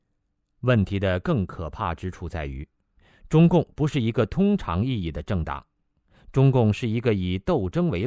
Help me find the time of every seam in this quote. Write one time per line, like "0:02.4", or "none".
none